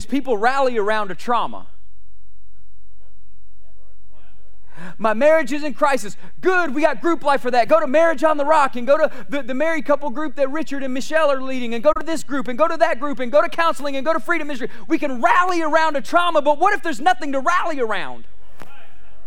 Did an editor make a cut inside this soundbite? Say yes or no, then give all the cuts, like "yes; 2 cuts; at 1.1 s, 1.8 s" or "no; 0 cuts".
no; 0 cuts